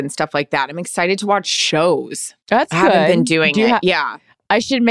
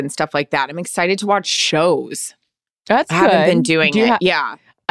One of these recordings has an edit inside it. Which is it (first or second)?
first